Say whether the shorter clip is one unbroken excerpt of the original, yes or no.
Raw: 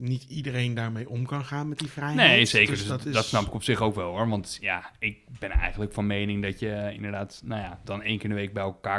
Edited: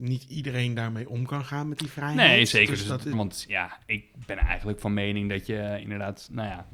no